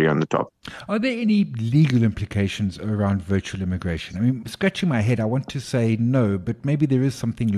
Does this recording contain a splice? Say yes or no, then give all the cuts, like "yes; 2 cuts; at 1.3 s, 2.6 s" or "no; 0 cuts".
no; 0 cuts